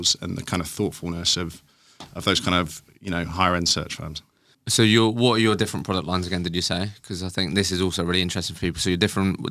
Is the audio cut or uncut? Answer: uncut